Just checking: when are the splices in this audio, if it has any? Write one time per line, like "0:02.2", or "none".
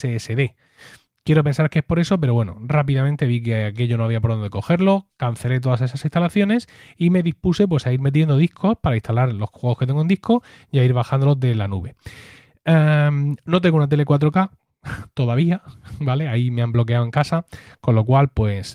none